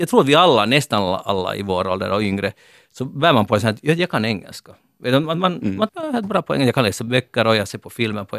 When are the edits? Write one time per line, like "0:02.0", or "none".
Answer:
0:05.9

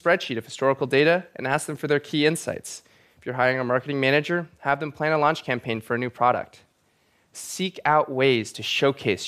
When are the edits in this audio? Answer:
0:07.2

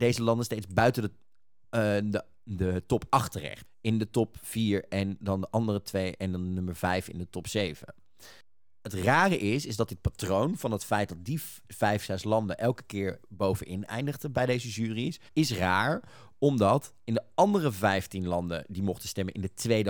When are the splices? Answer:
0:03.6
0:15.3

